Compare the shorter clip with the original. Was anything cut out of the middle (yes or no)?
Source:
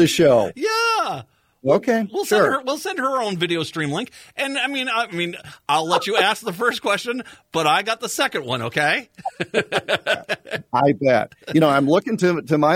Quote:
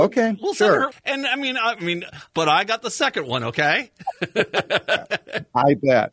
yes